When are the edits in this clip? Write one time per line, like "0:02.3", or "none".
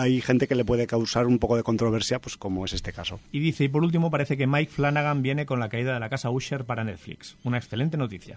0:03.3